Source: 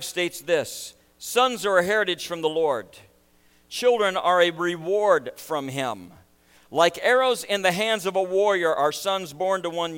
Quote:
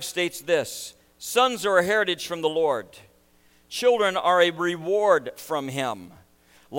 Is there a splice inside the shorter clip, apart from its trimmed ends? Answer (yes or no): no